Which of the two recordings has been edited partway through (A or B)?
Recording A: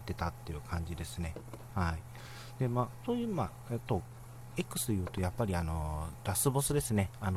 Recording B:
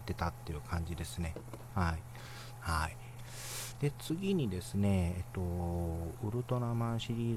B